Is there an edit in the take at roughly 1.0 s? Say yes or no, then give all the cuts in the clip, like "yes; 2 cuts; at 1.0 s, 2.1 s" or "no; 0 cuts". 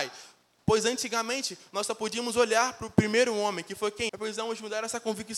no; 1 cut; at 4.1 s